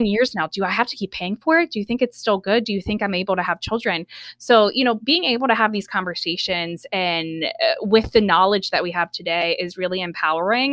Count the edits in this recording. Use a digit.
0